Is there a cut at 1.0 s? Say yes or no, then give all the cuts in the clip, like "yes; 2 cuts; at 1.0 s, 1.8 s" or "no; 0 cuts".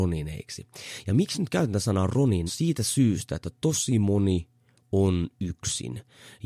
no; 1 cut; at 2.5 s